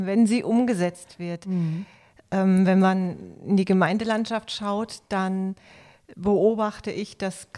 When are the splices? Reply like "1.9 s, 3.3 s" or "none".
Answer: none